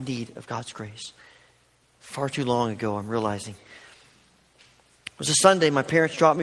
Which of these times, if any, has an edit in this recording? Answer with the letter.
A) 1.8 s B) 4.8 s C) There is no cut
A